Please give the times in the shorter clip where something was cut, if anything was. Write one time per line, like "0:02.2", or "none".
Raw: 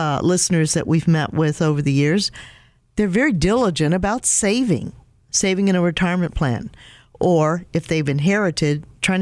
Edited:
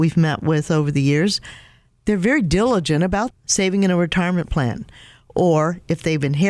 0:03.3